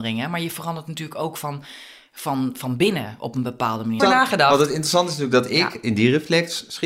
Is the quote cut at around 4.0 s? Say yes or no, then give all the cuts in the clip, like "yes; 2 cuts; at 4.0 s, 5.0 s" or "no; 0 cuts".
yes; 1 cut; at 4.0 s